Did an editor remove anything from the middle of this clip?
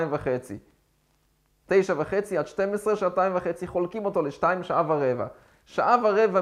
no; 0 cuts

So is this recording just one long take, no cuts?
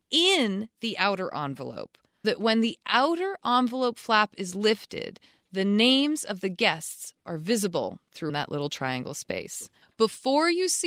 no; 2 cuts; at 2.2 s, 8.3 s

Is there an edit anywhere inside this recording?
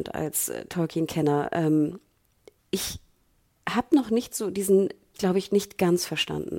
yes; 1 cut; at 5.1 s

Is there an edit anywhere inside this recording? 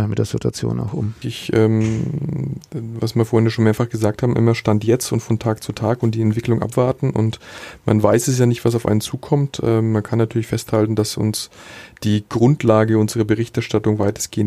yes; 1 cut; at 1.2 s

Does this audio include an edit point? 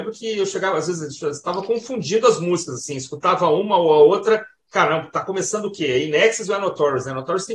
no; 0 cuts

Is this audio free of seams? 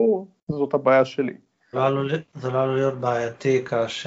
no; 1 cut; at 1.7 s

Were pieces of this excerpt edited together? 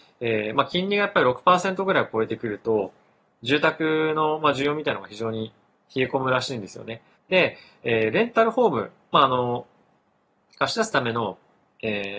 yes; 1 cut; at 7.1 s

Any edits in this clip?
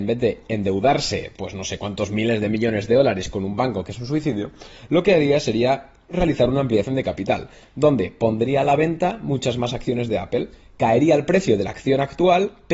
no; 0 cuts

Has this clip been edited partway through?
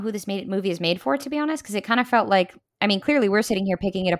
no; 0 cuts

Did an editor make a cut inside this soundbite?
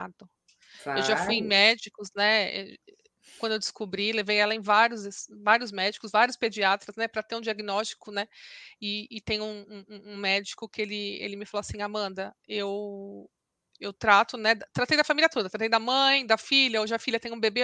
no; 0 cuts

